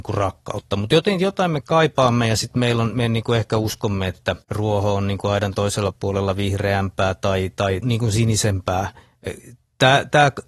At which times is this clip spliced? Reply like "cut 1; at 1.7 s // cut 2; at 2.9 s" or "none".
cut 1; at 4.4 s // cut 2; at 7.8 s